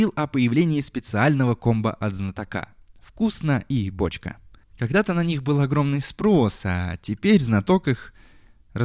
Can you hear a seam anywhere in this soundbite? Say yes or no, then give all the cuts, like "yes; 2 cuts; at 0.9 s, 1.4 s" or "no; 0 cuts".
yes; 1 cut; at 4.6 s